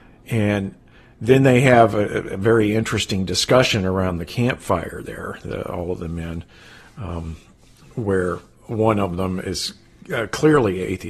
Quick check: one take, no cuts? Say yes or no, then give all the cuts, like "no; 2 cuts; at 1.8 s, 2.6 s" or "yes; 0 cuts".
yes; 0 cuts